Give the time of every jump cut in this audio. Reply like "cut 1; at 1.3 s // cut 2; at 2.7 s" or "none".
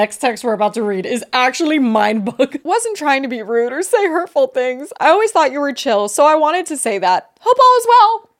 cut 1; at 2.6 s